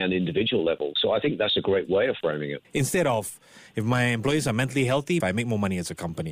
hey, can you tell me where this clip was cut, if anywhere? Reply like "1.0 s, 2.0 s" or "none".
2.6 s, 5.2 s